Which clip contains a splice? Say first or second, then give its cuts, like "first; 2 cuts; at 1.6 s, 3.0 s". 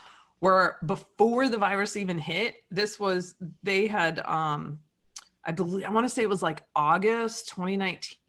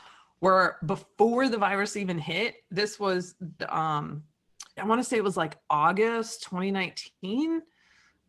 second; 2 cuts; at 3.6 s, 4.8 s